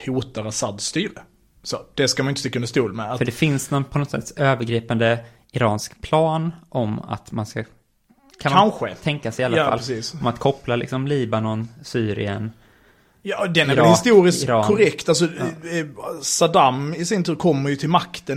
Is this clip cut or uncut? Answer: uncut